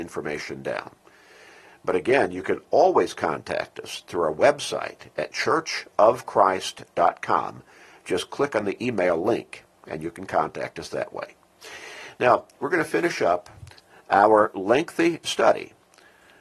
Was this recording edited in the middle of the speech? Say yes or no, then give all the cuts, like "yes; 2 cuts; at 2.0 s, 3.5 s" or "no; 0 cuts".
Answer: no; 0 cuts